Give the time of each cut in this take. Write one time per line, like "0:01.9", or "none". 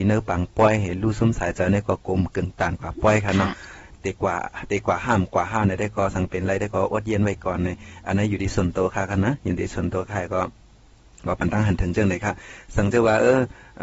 none